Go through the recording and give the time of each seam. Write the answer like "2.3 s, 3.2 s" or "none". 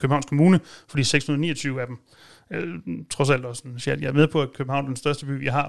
none